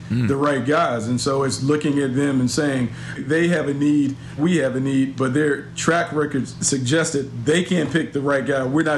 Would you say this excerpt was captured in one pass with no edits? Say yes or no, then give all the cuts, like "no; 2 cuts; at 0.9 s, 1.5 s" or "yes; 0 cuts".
no; 2 cuts; at 3.2 s, 4.4 s